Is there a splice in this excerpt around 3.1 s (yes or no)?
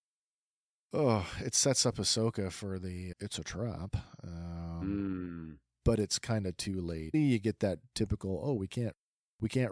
yes